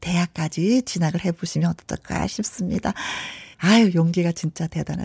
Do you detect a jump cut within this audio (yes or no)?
yes